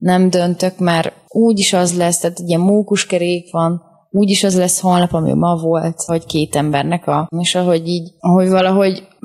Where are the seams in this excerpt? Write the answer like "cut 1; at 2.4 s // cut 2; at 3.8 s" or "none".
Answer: cut 1; at 6.1 s // cut 2; at 7.3 s